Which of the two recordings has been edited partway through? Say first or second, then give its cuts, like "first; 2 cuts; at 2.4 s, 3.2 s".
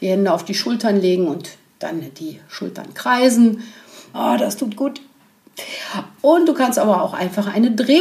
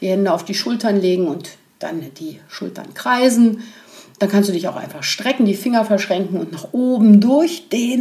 first; 1 cut; at 4.1 s